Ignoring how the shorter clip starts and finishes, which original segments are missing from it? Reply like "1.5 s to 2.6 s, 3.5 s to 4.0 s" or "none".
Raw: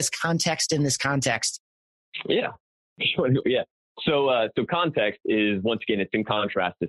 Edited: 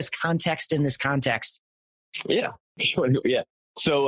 2.6 s to 2.9 s

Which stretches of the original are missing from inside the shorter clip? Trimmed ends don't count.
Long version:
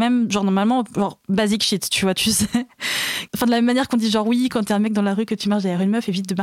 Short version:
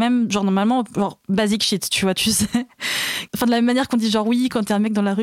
none

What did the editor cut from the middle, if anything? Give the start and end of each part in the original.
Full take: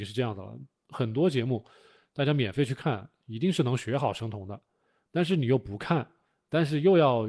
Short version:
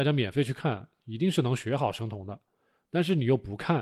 none

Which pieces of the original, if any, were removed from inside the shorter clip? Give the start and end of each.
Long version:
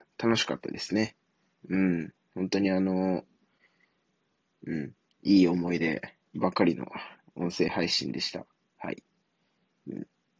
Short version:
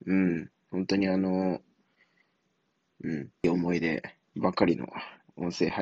5.1 s to 5.4 s

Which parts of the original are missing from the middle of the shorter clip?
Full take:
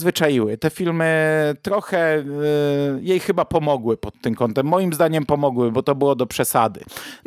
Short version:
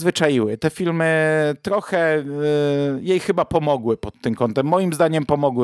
none

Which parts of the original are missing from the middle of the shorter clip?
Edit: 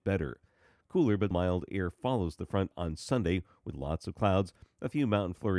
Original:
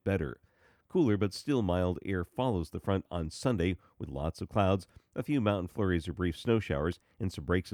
1.3 s to 1.6 s

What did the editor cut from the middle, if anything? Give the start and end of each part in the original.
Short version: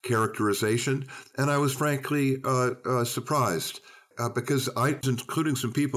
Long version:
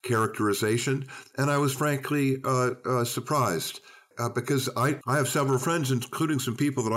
5.0 s to 5.9 s

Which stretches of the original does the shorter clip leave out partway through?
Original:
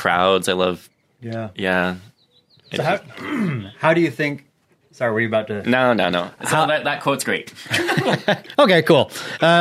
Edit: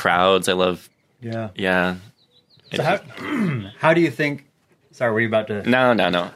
none

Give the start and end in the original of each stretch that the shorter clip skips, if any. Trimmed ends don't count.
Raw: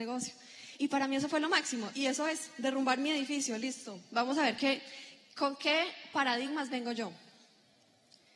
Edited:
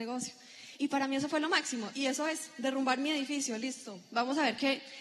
none

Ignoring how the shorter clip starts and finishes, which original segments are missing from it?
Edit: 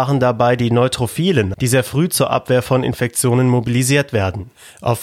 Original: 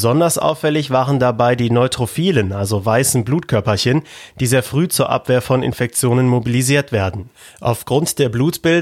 2.5 s to 4.3 s

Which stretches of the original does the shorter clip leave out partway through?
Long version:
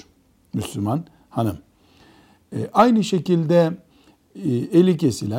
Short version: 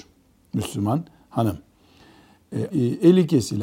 2.7 s to 4.4 s

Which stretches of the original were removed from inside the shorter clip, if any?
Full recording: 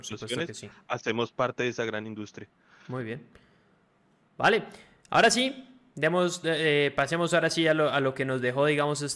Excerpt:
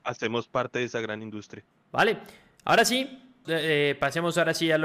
2.6 s to 4.2 s, 5.9 s to 6.4 s

